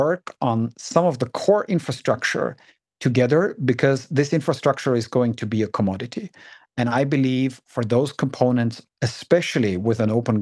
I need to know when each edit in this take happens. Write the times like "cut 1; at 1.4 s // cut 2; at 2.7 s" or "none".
cut 1; at 6.7 s // cut 2; at 8.9 s